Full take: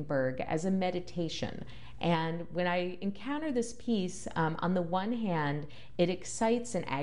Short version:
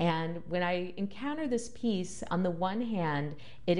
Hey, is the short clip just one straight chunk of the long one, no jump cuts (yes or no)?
no